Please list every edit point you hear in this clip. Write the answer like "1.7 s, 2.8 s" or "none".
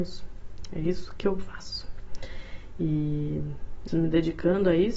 3.9 s